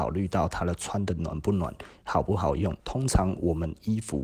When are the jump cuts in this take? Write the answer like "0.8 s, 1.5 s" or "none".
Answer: 2.8 s